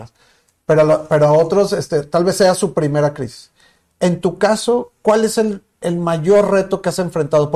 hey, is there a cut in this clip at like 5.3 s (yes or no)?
no